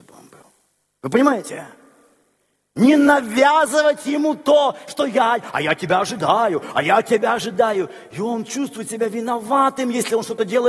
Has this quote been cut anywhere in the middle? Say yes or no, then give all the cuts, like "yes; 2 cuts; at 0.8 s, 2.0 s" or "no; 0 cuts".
no; 0 cuts